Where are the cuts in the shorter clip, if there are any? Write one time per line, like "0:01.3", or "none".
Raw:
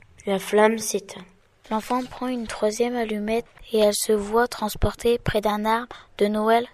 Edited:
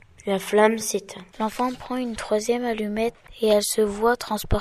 0:01.3